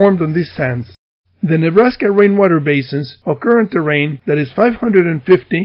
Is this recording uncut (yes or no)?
no